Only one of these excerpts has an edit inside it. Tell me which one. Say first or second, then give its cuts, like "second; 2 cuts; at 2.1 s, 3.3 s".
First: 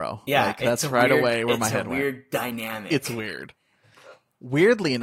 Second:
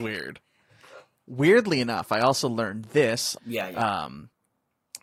second; 1 cut; at 3.4 s